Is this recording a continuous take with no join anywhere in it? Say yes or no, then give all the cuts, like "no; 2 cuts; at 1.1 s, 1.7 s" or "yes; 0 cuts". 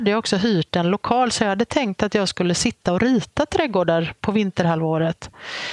yes; 0 cuts